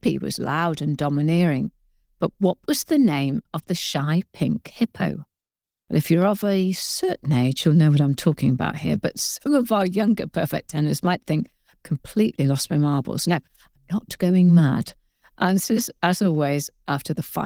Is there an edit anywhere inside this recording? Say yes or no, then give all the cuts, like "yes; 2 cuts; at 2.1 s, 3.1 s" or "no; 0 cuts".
no; 0 cuts